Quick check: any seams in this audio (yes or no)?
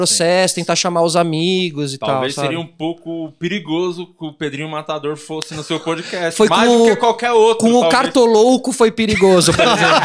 no